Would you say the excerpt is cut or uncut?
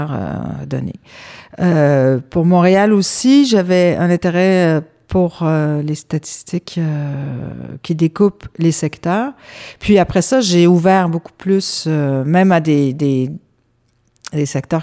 uncut